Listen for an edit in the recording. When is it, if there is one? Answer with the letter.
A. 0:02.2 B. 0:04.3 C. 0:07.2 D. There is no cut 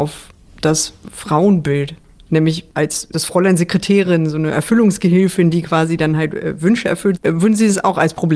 C